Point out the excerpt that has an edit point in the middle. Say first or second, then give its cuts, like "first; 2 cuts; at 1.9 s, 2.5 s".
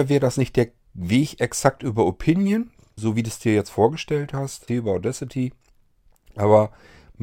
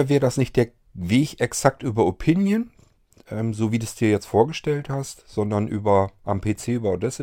first; 2 cuts; at 3.0 s, 4.7 s